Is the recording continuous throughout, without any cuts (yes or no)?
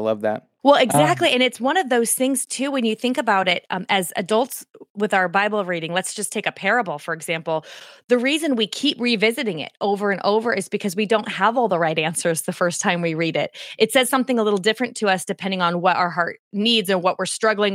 yes